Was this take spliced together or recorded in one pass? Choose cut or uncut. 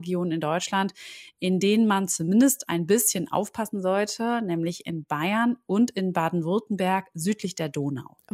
uncut